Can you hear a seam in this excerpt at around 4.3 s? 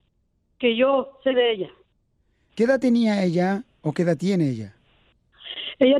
no; 1 cut; at 2.5 s

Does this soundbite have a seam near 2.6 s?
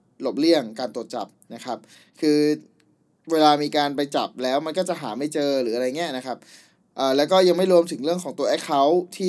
no; 0 cuts

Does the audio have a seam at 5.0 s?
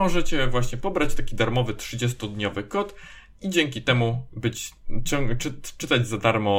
no; 0 cuts

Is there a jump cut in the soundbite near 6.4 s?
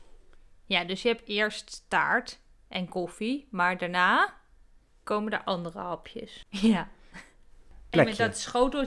yes; 2 cuts; at 6.4 s, 7.9 s

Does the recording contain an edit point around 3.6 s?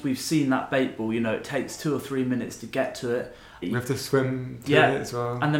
yes; 1 cut; at 3.6 s

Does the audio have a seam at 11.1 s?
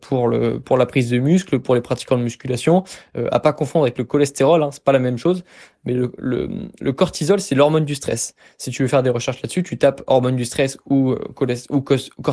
no; 0 cuts

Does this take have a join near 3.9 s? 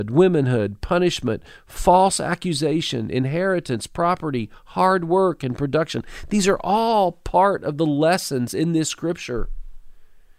no; 0 cuts

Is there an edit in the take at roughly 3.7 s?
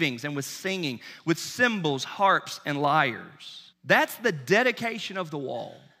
yes; 1 cut; at 3.7 s

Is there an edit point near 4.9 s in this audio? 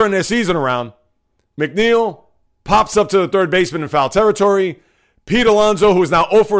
no; 1 cut; at 1.5 s

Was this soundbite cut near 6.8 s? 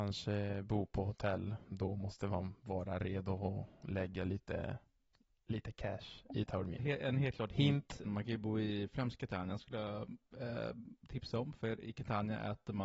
yes; 2 cuts; at 6.8 s, 8.0 s

